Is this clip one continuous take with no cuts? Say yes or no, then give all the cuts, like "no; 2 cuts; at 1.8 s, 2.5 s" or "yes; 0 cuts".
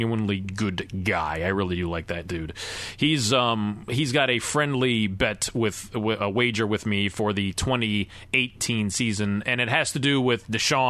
yes; 0 cuts